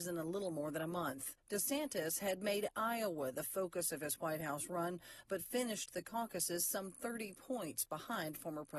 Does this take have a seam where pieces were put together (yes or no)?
no